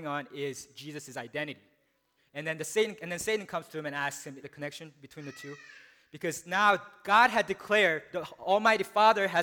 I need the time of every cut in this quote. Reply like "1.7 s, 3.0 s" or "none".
2.2 s, 4.4 s